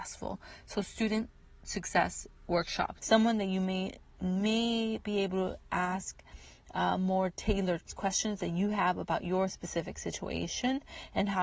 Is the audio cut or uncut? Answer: cut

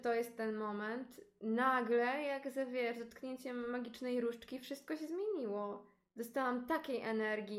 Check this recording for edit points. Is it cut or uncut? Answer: uncut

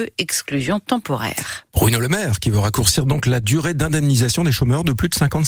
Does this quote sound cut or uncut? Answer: uncut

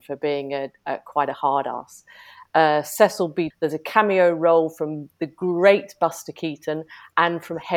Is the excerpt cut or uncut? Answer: cut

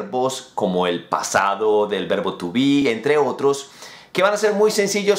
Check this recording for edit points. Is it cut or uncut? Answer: uncut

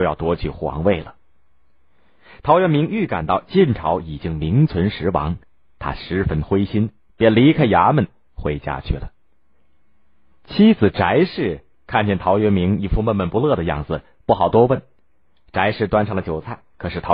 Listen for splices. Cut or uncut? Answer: uncut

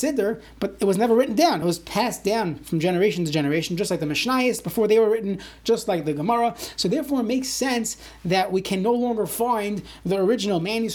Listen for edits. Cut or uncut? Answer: uncut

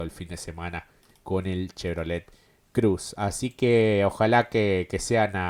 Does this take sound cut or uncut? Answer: uncut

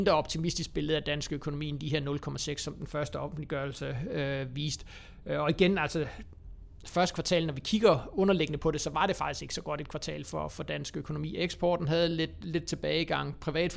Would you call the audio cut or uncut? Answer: uncut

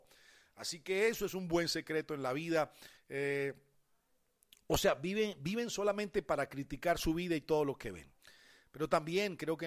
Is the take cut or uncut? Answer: cut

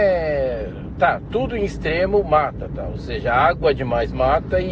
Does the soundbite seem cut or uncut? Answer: uncut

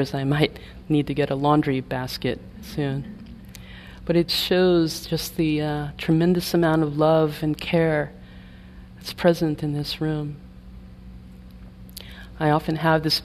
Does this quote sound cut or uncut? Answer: cut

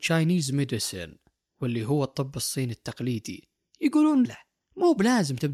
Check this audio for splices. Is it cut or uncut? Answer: cut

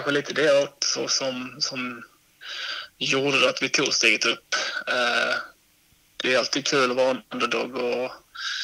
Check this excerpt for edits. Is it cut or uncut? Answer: uncut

